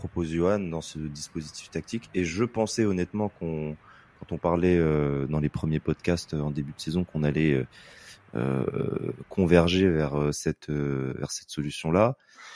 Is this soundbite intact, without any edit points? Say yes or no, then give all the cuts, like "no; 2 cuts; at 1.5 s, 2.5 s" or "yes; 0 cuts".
yes; 0 cuts